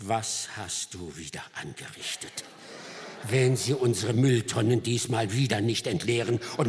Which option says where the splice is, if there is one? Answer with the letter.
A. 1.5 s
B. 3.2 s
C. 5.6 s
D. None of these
D